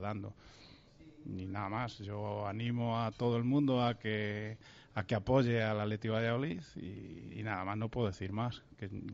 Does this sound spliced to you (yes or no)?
no